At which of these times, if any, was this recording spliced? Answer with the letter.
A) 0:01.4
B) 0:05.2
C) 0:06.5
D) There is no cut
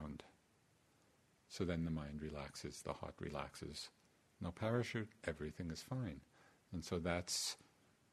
B